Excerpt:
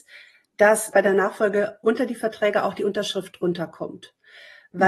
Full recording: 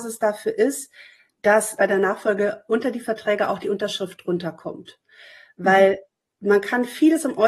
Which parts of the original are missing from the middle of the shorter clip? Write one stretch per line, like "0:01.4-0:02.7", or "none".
none